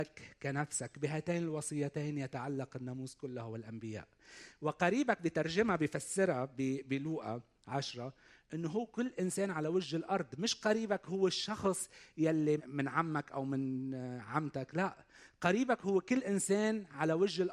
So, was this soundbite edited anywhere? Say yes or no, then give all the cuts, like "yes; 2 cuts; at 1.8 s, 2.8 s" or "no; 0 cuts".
yes; 1 cut; at 12.6 s